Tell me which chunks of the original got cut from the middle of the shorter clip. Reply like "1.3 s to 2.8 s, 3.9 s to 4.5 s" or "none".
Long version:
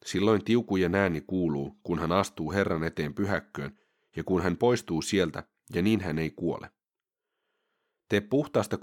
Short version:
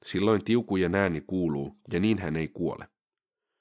1.8 s to 5.6 s